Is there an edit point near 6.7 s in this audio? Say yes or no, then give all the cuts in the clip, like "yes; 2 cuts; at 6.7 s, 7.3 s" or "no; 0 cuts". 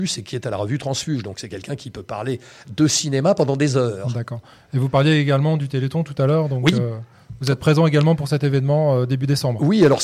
no; 0 cuts